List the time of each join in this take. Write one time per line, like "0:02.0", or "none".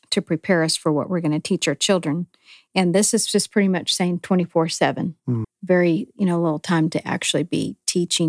0:05.4